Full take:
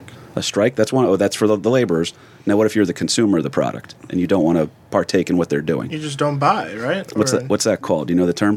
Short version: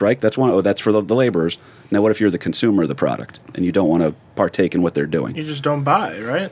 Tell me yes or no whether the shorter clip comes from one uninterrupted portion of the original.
yes